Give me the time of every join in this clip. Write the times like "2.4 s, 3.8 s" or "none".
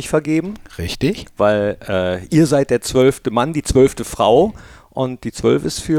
none